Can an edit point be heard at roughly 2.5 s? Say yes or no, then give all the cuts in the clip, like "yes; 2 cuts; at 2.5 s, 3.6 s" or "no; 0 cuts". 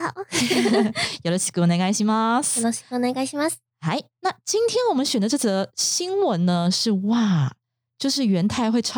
no; 0 cuts